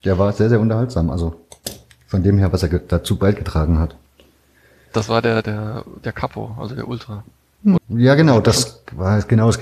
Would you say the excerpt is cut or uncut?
cut